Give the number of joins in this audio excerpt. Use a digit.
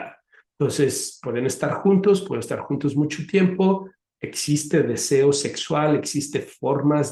0